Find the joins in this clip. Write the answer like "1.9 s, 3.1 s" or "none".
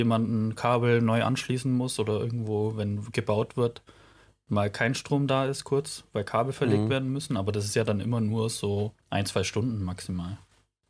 9.0 s